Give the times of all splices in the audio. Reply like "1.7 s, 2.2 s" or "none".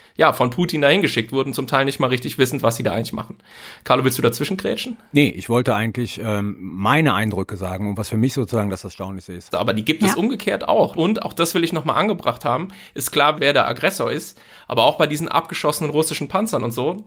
9.5 s, 10.9 s, 13.3 s